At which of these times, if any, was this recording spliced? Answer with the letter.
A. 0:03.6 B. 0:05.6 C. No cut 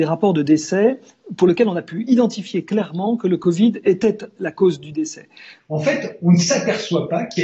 B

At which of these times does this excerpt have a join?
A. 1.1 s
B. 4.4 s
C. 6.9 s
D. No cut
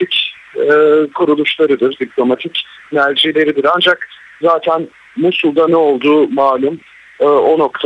B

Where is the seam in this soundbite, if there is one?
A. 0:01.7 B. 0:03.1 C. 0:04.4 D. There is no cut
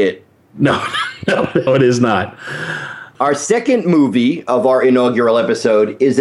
A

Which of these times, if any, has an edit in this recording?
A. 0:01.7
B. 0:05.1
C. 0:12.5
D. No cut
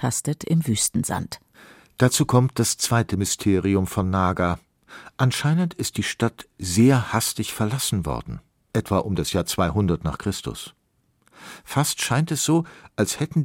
D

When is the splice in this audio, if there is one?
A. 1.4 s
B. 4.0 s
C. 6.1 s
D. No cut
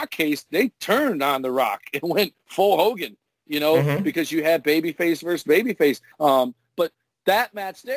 C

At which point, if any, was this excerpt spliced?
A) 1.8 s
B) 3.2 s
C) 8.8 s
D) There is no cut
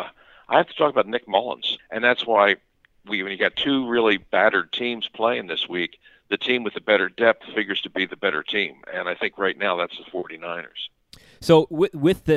A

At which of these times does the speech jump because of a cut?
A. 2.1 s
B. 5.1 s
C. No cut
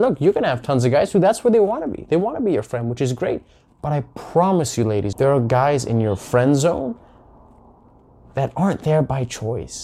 B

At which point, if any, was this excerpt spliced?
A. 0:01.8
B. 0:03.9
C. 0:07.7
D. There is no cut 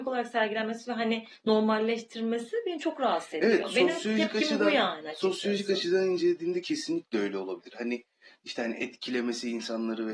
D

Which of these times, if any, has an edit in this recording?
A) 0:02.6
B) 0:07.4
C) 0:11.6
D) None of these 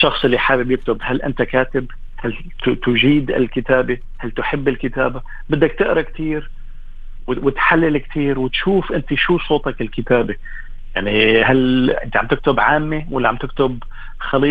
D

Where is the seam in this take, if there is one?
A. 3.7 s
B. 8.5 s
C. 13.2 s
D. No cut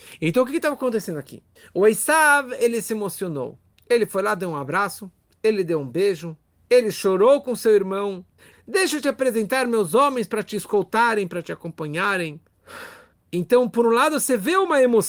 B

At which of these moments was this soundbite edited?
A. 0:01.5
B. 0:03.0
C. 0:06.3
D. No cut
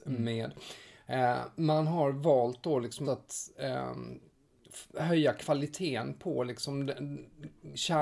B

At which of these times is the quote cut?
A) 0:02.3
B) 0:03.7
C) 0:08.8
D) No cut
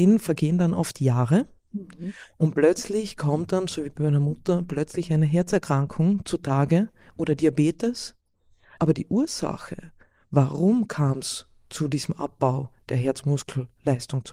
C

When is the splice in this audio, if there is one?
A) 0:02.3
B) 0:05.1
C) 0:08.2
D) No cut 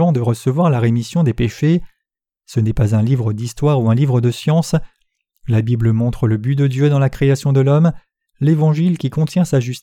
D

